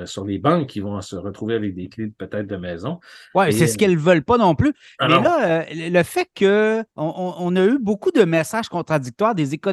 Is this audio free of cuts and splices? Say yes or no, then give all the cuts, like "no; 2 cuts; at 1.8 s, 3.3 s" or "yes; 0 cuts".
no; 1 cut; at 6.9 s